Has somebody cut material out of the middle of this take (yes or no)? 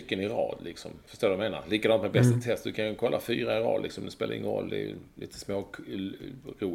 no